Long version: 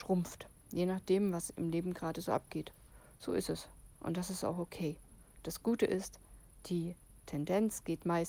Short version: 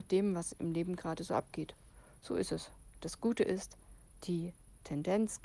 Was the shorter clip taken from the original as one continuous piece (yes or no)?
no